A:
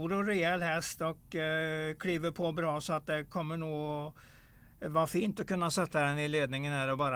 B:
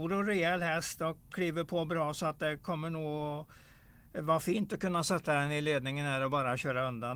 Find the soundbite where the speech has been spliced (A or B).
B